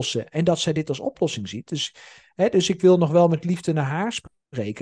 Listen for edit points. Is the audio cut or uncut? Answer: uncut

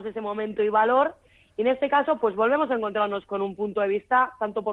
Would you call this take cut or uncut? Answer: uncut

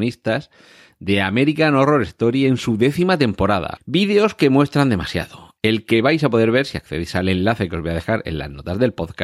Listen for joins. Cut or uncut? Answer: cut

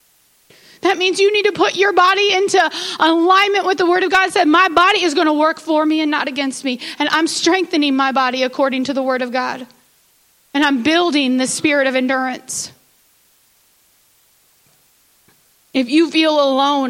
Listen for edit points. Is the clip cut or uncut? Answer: uncut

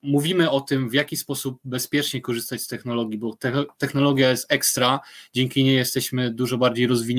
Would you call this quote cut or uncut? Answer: uncut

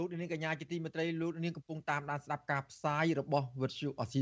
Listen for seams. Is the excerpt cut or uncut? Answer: uncut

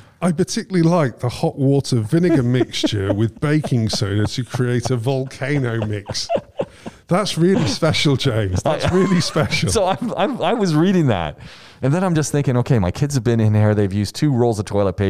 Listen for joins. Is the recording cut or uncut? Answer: uncut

